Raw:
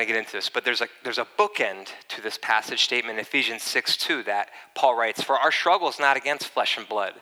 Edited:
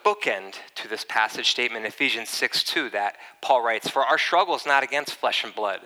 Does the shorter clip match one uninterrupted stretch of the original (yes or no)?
yes